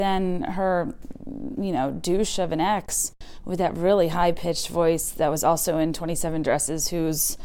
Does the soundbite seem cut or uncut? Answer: uncut